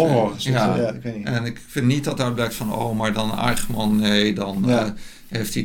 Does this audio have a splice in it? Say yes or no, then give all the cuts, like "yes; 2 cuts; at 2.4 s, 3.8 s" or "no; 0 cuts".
no; 0 cuts